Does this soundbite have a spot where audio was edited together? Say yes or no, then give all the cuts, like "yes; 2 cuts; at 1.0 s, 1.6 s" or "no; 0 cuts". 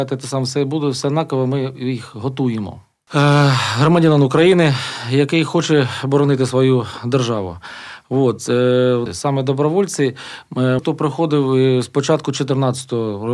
yes; 3 cuts; at 3.1 s, 9.1 s, 10.8 s